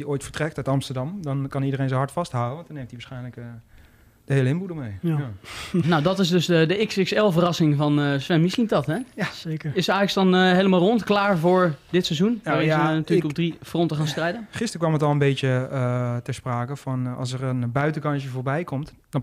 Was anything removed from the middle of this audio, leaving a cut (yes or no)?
yes